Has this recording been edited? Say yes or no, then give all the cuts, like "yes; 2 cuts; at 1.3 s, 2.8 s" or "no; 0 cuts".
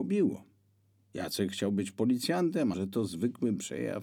yes; 1 cut; at 2.7 s